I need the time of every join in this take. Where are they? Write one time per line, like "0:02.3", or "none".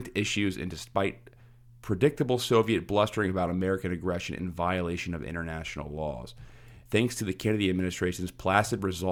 0:06.9